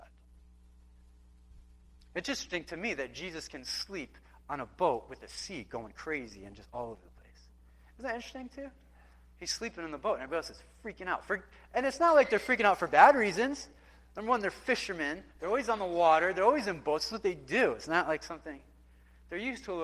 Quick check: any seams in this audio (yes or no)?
no